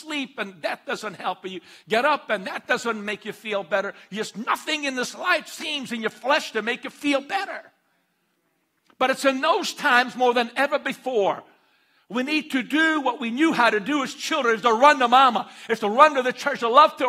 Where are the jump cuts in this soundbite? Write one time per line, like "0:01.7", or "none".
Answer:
none